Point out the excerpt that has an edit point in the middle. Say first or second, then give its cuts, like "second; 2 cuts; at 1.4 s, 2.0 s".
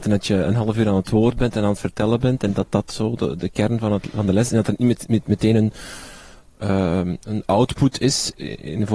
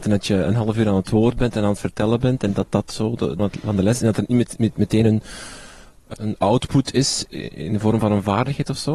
second; 2 cuts; at 3.4 s, 6.1 s